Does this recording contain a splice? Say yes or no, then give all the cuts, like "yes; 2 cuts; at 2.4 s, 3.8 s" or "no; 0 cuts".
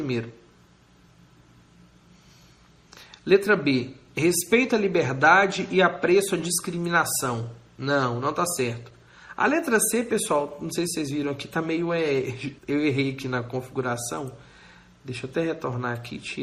yes; 1 cut; at 12.6 s